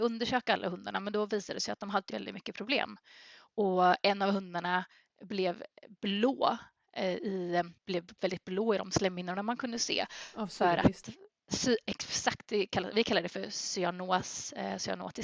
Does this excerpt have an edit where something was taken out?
yes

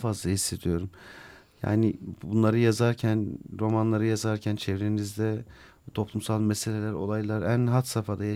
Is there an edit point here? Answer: no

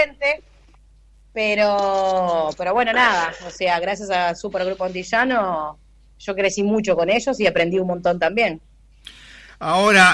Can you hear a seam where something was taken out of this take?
no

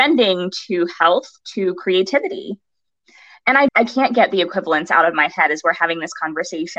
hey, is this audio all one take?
no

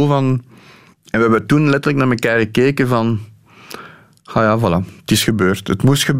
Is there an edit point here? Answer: yes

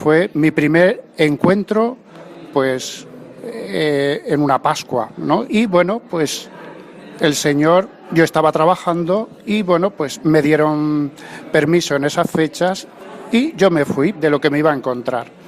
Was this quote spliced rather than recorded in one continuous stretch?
yes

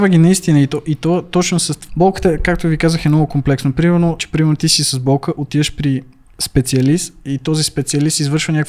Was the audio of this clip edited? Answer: yes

